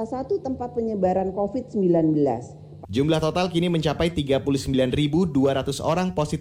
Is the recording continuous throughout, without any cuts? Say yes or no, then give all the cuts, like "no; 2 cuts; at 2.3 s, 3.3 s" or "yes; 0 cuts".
no; 1 cut; at 2.8 s